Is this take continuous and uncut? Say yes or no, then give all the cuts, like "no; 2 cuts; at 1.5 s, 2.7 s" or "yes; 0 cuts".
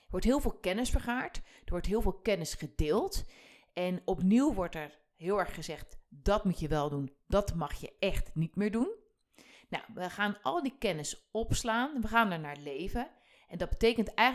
yes; 0 cuts